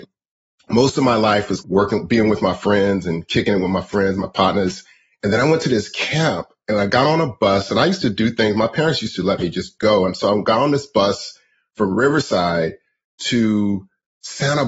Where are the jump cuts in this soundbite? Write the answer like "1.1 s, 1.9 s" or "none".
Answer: none

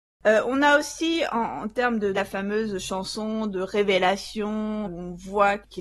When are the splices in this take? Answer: 2.1 s, 4.8 s

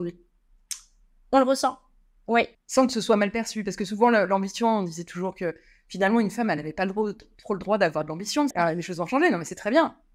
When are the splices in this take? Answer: 2.5 s, 8.5 s

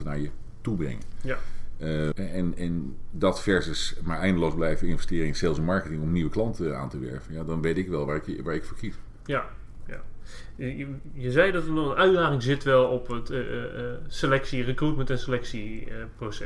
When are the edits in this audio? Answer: 2.1 s

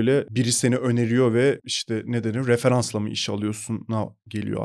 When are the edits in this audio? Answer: none

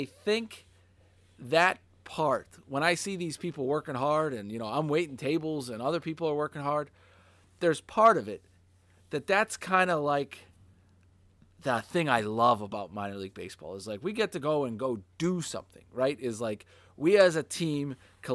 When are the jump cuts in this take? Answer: none

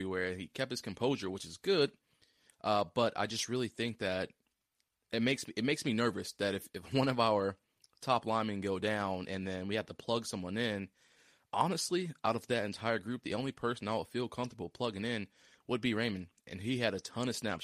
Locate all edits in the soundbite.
none

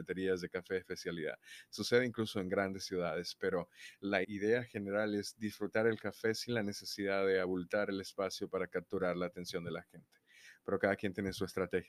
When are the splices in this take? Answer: 4.2 s

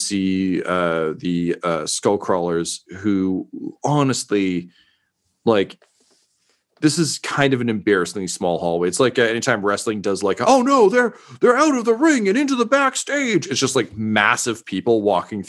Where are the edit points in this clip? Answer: none

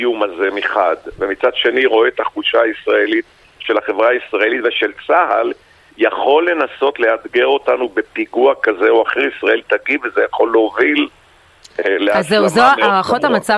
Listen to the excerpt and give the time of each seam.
none

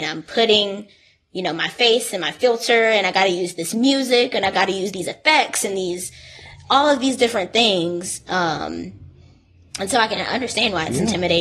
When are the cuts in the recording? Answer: none

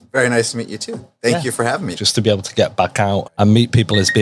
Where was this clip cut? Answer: 1.9 s, 3.2 s

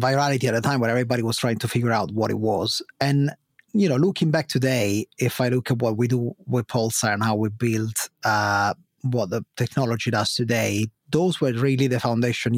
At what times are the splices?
2.9 s

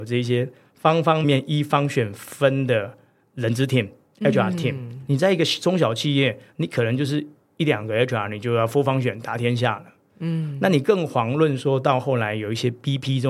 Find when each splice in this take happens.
1.2 s

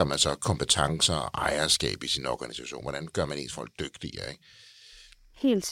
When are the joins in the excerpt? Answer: none

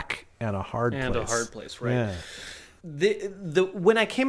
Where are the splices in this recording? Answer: 2.8 s

